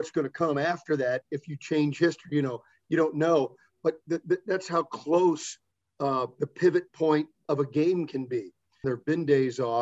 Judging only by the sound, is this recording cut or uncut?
cut